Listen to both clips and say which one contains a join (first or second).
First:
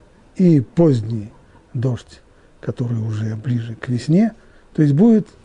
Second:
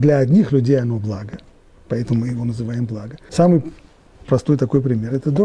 second